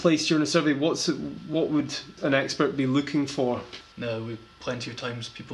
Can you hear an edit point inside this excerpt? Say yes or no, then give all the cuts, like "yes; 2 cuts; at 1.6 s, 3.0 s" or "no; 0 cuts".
yes; 1 cut; at 3.9 s